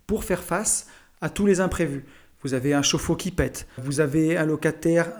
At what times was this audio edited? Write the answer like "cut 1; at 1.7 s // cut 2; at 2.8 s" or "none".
cut 1; at 3.8 s